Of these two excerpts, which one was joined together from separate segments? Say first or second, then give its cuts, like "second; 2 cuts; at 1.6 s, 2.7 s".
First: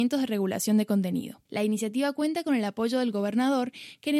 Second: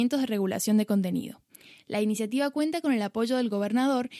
first; 1 cut; at 1.5 s